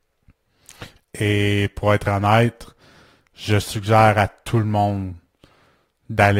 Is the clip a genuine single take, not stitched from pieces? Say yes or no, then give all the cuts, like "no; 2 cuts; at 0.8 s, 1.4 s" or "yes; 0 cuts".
no; 1 cut; at 1.0 s